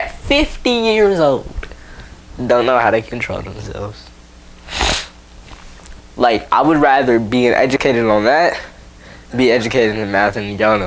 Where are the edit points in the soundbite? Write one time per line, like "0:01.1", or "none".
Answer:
0:02.2
0:06.0